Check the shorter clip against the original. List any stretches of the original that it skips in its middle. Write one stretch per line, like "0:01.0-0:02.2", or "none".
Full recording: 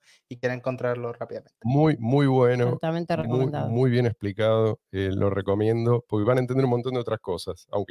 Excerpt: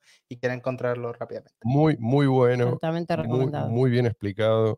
none